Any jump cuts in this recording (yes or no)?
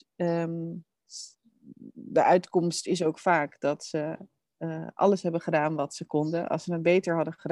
no